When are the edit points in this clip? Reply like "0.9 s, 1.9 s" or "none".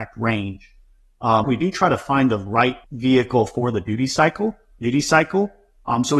1.4 s, 2.8 s, 4.8 s